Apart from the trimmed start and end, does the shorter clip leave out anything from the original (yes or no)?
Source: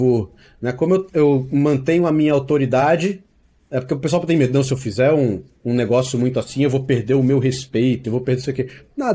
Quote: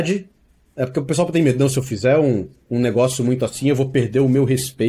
no